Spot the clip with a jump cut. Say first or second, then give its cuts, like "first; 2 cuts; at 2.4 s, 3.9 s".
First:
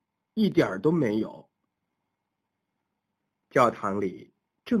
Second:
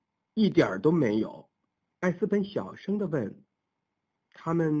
second; 1 cut; at 1.9 s